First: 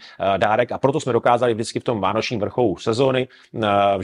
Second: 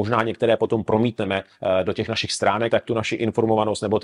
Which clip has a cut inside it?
second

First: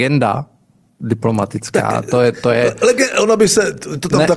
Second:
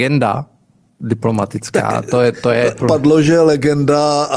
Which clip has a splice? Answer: second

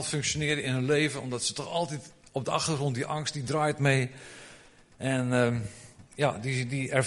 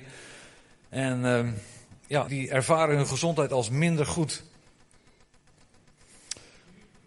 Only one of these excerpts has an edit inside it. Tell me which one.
second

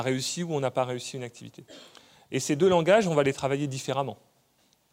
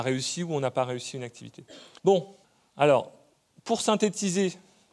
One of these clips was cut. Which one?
second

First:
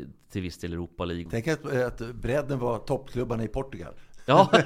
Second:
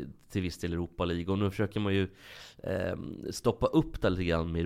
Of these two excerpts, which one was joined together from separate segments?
first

